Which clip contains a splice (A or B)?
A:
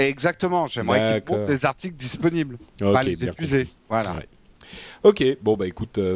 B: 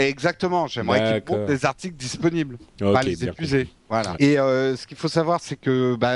B